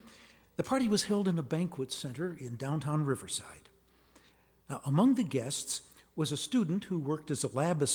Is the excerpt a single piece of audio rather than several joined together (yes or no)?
yes